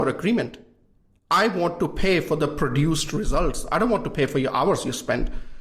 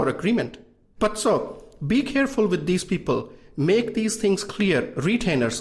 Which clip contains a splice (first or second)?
second